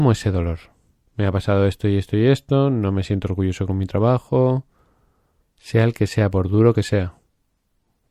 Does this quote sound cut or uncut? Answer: cut